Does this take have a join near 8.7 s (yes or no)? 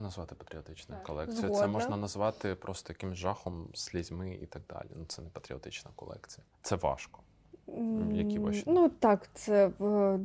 no